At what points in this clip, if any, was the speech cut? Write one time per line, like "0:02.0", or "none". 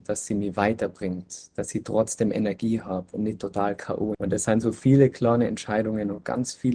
0:04.1